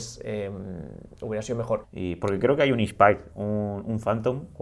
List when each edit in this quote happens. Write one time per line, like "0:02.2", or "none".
0:01.8
0:03.3